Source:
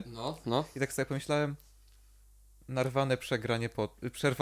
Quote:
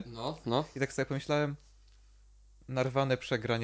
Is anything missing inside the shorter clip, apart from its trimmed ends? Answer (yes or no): no